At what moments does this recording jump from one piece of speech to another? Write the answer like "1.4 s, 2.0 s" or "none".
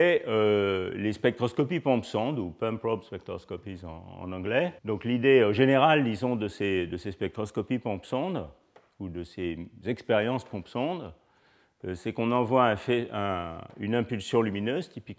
4.8 s